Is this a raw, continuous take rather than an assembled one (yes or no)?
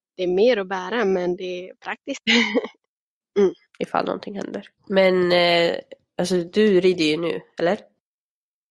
no